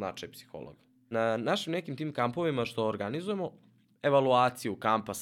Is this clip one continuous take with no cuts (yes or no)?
no